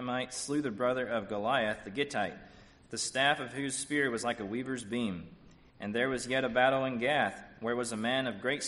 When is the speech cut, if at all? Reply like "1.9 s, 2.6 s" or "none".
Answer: none